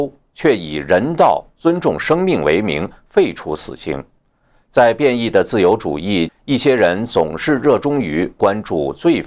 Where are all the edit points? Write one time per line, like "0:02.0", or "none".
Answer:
0:01.5
0:06.3